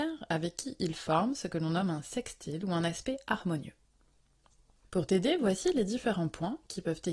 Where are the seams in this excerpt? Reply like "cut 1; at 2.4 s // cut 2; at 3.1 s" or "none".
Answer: cut 1; at 4.8 s